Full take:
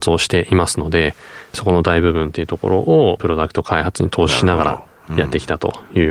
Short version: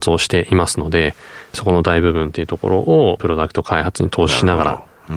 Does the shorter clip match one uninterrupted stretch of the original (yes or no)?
yes